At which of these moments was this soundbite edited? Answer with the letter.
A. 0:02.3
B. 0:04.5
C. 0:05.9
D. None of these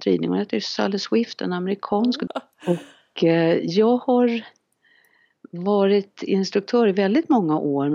A